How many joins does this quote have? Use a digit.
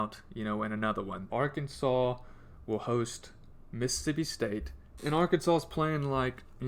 2